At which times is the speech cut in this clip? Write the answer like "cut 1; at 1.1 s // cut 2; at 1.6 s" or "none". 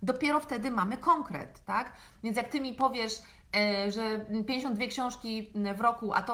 none